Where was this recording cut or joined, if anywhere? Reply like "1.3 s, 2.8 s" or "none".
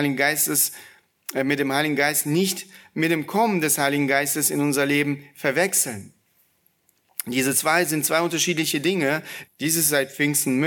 9.4 s